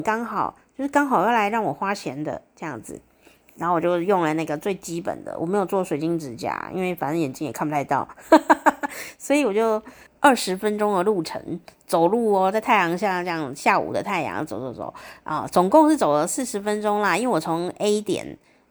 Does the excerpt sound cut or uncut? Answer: cut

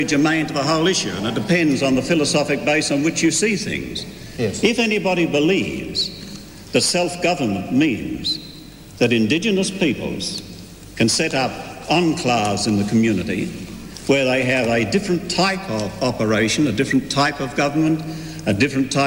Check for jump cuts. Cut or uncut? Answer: uncut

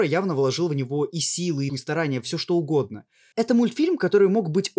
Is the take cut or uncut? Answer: cut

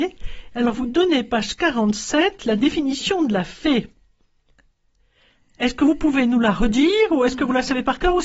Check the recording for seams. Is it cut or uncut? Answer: uncut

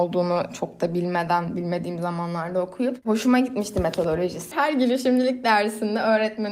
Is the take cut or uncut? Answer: cut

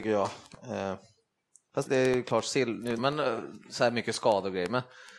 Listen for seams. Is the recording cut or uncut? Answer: cut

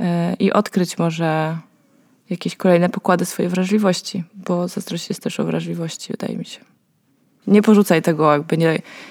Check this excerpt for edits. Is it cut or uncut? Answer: cut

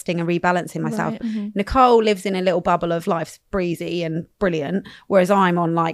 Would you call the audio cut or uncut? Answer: cut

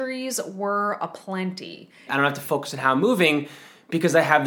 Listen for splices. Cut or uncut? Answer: cut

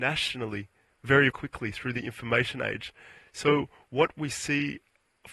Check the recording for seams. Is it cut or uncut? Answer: cut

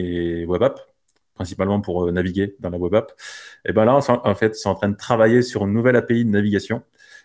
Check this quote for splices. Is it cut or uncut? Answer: uncut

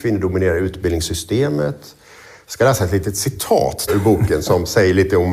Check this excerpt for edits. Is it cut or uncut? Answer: cut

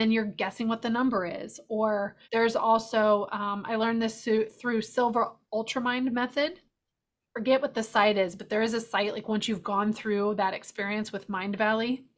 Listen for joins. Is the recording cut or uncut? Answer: cut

